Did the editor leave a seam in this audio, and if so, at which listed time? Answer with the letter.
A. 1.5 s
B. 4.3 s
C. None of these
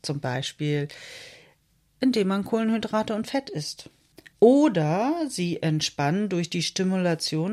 B